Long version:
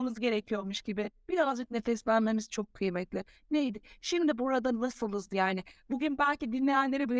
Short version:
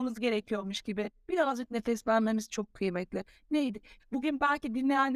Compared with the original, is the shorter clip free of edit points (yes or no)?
no